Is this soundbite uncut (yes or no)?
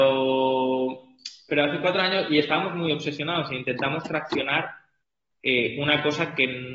yes